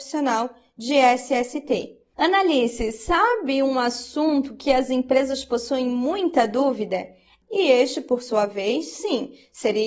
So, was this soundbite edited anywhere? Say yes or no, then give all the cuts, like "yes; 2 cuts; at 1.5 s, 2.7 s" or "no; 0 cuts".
yes; 2 cuts; at 2.1 s, 7.4 s